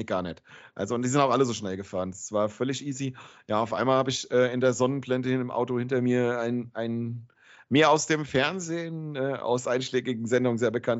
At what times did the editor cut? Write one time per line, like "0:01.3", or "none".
none

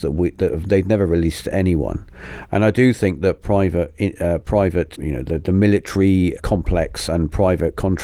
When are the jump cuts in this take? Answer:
0:04.9
0:06.4

